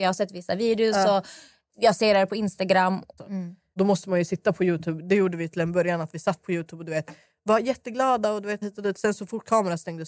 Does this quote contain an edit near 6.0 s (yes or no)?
no